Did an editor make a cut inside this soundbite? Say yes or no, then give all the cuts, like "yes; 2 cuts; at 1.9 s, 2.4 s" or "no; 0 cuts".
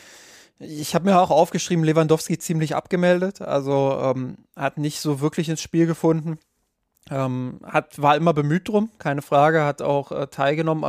no; 0 cuts